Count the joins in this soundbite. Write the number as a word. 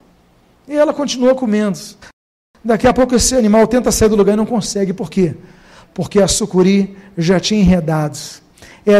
zero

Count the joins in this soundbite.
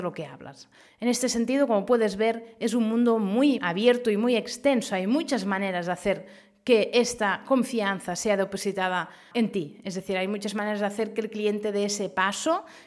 two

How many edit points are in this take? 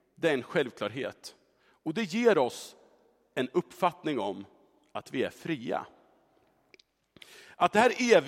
zero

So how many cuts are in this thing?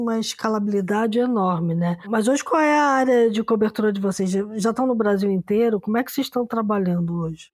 zero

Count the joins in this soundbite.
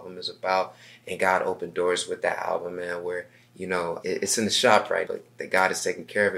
two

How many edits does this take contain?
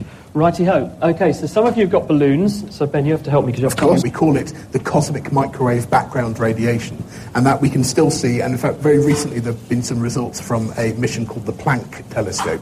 one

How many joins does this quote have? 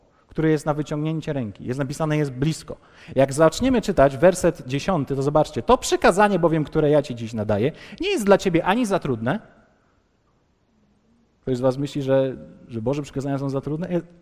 zero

